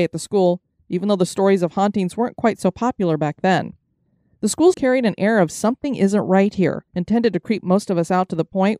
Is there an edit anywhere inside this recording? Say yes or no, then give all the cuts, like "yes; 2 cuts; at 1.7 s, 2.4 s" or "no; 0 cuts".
yes; 2 cuts; at 4.7 s, 6.9 s